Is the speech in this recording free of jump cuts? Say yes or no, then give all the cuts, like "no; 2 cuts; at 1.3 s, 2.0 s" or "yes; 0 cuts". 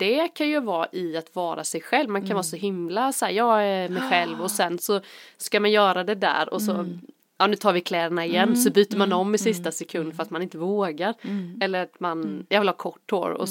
yes; 0 cuts